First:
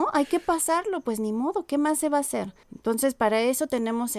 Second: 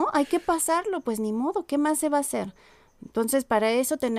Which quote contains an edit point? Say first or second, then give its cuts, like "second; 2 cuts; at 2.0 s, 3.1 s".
first; 1 cut; at 2.6 s